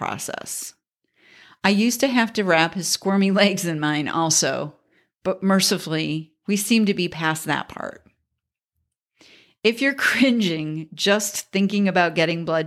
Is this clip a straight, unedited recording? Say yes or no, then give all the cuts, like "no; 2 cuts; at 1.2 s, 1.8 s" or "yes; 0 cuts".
yes; 0 cuts